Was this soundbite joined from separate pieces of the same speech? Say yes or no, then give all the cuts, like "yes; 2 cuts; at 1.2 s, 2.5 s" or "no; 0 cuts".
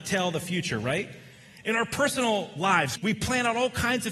yes; 1 cut; at 2.9 s